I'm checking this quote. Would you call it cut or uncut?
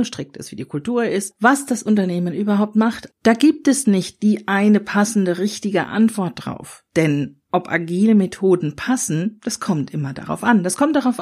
cut